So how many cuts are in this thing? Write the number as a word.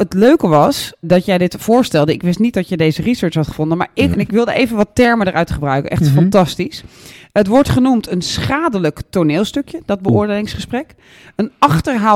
two